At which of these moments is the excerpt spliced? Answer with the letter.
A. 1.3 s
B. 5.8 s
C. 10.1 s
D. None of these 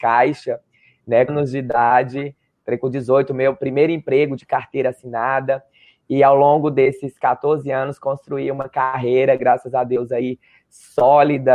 A